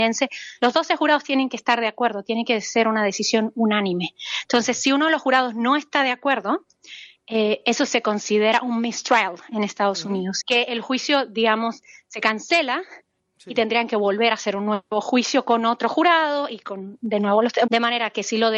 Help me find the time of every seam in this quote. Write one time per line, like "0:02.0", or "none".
0:10.4
0:17.7